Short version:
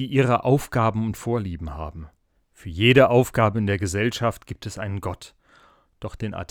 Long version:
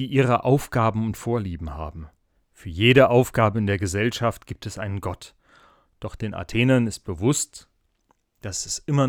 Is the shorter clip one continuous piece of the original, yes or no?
yes